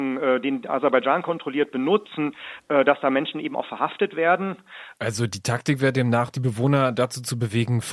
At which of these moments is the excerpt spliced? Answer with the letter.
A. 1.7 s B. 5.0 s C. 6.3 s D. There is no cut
B